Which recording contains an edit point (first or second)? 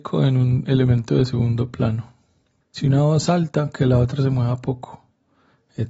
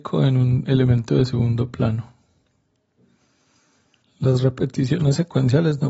first